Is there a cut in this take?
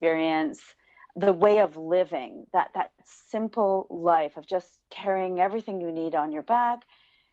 no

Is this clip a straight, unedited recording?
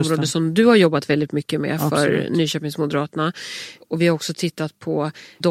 yes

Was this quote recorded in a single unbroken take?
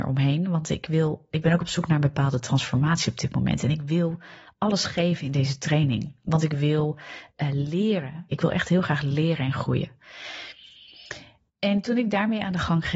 yes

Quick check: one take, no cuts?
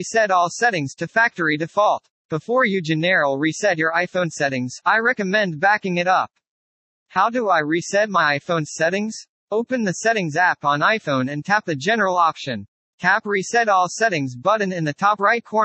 no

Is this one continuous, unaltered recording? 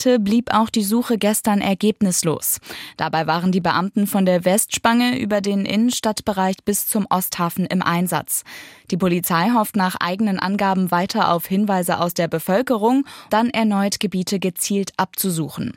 no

